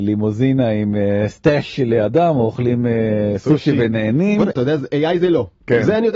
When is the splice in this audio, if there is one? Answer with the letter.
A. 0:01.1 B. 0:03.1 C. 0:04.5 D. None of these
C